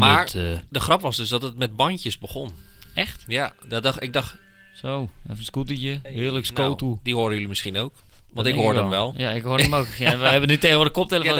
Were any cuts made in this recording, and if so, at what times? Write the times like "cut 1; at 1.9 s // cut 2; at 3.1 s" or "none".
none